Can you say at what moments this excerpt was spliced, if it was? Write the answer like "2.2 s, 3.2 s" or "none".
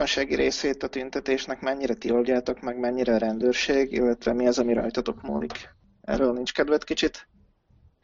none